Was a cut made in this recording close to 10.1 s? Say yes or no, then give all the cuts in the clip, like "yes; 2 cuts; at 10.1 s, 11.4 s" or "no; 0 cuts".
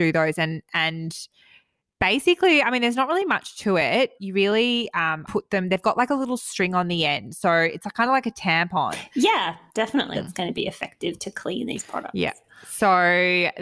yes; 2 cuts; at 5.2 s, 10.1 s